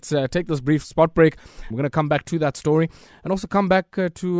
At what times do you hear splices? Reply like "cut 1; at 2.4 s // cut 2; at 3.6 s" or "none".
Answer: cut 1; at 1.7 s